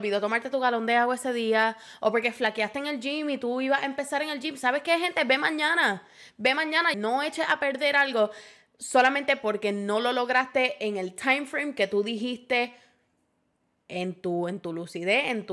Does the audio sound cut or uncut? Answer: cut